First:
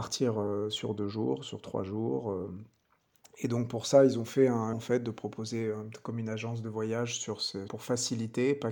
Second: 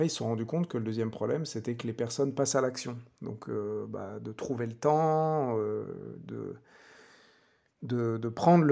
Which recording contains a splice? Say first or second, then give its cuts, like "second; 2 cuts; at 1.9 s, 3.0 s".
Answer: first; 2 cuts; at 4.7 s, 7.7 s